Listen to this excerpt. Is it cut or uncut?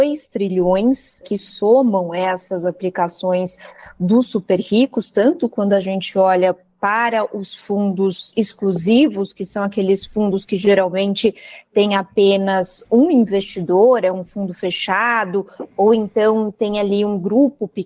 cut